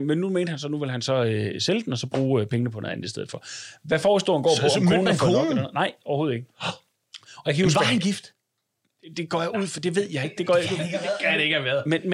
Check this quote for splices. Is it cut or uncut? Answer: uncut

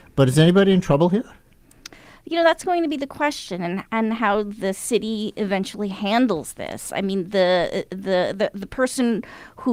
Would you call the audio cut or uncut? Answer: uncut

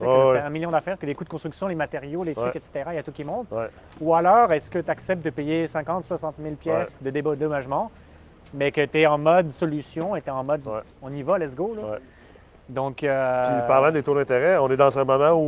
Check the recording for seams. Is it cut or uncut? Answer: uncut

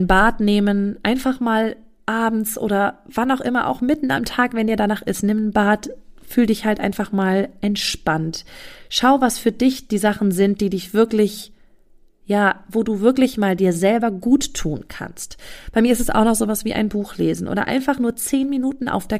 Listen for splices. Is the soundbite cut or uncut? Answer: uncut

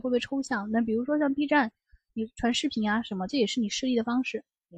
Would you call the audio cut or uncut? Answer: uncut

